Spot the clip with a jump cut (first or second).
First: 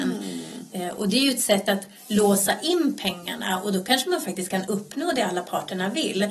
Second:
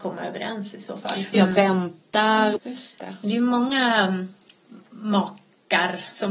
second